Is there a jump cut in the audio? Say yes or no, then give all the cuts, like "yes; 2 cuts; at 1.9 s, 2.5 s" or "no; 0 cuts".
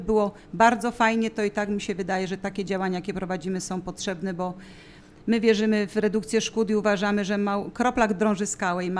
no; 0 cuts